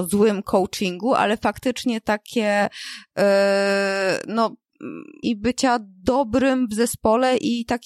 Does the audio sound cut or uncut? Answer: cut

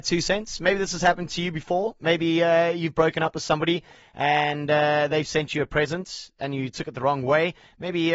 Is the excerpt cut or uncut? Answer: uncut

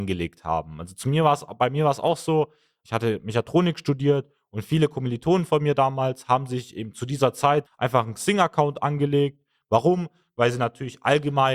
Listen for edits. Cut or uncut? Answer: cut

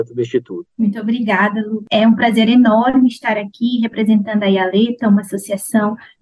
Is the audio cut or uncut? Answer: uncut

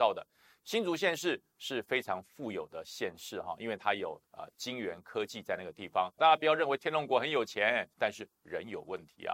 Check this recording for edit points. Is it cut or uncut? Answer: cut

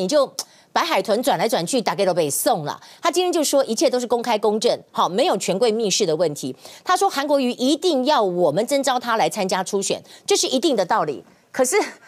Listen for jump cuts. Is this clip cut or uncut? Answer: uncut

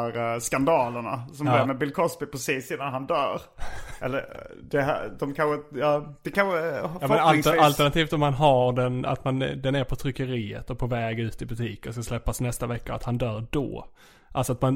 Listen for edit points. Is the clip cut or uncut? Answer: uncut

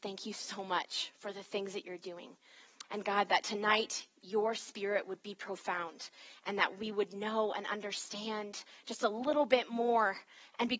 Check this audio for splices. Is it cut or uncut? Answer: cut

